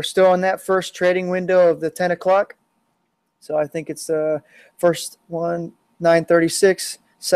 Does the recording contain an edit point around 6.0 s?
no; 0 cuts

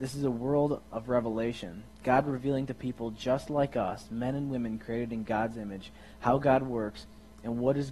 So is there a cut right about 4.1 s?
no; 0 cuts

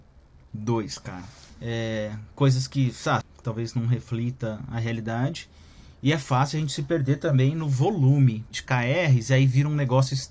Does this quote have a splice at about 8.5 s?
yes; 3 cuts; at 1.5 s, 3.2 s, 8.5 s

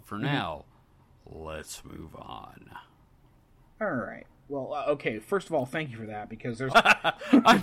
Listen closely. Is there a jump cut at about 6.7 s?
yes; 1 cut; at 6.7 s

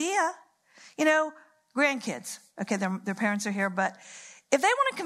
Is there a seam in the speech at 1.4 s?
no; 0 cuts

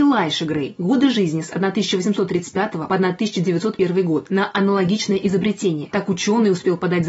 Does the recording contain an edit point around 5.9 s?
yes; 1 cut; at 5.9 s

